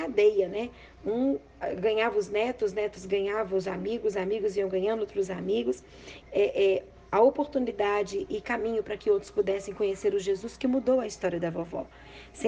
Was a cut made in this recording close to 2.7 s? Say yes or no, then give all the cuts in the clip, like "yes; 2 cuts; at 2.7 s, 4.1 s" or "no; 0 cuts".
no; 1 cut; at 6.2 s